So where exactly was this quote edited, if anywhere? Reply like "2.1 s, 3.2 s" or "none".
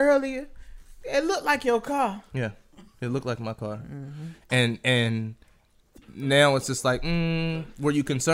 none

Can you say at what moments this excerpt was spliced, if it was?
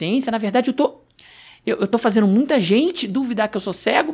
none

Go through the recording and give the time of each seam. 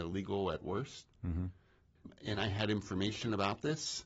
none

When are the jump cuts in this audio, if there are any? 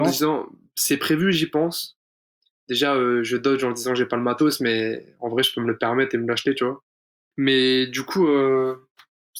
7.3 s

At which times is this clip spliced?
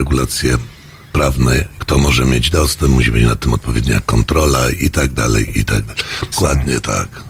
1.8 s, 6.3 s

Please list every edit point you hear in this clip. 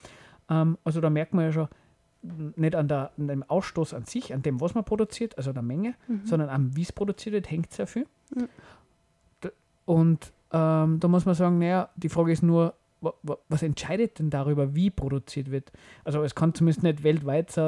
13.4 s

